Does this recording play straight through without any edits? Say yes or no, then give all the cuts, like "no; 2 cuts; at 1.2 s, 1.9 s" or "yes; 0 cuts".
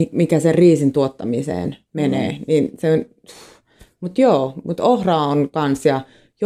yes; 0 cuts